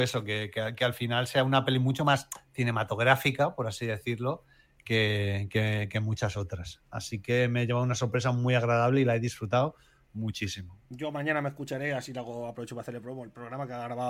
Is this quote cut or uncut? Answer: uncut